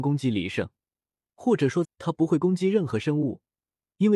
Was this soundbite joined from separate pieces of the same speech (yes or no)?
yes